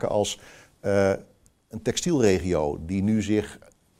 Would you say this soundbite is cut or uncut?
uncut